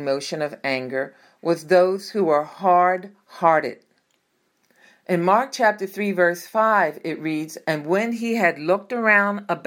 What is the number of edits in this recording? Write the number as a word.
zero